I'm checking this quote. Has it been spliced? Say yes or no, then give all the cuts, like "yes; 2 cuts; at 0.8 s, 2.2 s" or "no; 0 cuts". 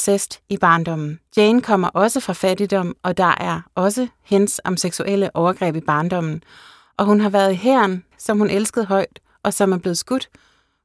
yes; 2 cuts; at 1.3 s, 8.1 s